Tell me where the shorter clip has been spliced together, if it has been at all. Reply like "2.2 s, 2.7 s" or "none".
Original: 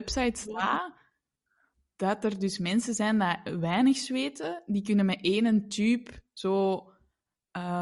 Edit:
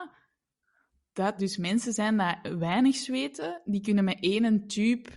1.4 s